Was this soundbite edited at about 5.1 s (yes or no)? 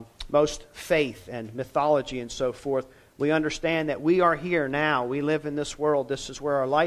no